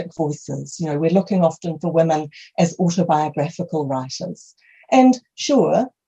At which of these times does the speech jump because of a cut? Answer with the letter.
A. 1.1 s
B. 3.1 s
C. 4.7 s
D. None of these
D